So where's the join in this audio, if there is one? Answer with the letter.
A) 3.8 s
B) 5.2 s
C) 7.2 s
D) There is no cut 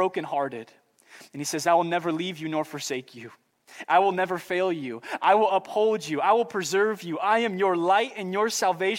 D